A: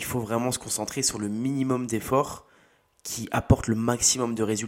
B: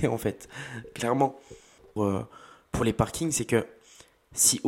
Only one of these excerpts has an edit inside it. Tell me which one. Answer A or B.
B